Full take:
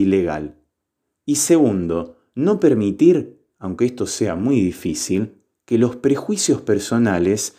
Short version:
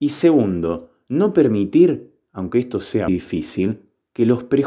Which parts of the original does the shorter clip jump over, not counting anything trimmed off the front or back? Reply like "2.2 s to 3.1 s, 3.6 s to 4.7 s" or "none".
4.3 s to 4.6 s